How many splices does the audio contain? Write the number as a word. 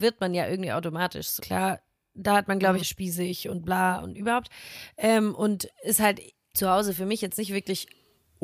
three